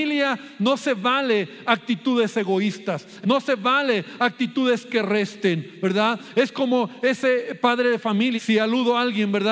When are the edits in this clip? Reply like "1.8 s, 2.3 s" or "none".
3.2 s, 8.4 s

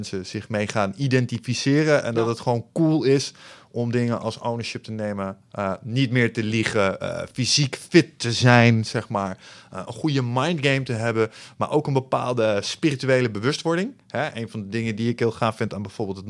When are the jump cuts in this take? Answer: none

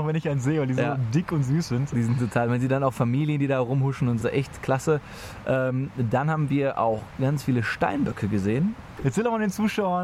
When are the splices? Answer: 4.2 s, 9.0 s

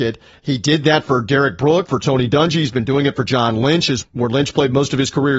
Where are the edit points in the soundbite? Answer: 1.9 s, 4.0 s

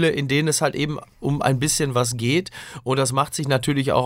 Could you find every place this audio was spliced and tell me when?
none

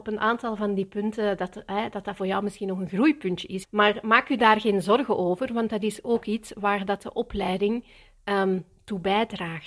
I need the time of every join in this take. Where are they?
3.6 s

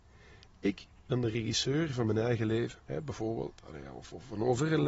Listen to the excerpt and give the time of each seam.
2.9 s

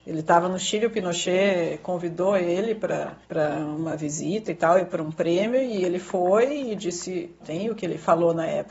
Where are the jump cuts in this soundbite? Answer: 3.2 s, 7.4 s

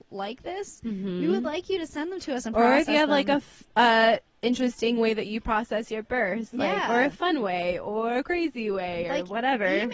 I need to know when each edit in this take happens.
none

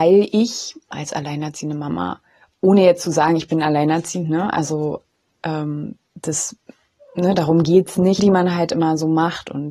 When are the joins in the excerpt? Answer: 8.2 s

